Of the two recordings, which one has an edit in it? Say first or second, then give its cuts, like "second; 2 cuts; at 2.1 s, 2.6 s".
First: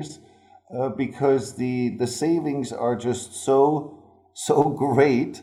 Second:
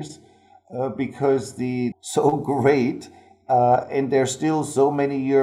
second; 1 cut; at 1.9 s